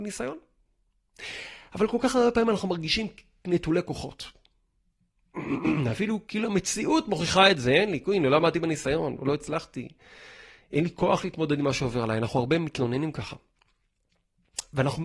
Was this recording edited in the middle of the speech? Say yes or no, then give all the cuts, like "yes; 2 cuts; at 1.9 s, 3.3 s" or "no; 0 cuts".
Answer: no; 0 cuts